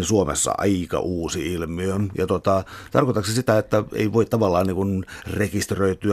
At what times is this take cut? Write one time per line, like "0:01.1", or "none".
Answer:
none